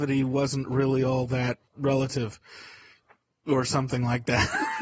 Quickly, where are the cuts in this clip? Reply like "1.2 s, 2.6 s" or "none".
1.7 s